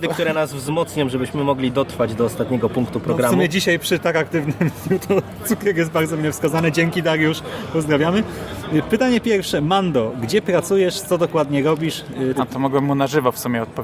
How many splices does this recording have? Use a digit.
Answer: 1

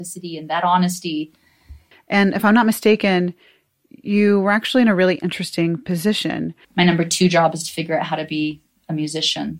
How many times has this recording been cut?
2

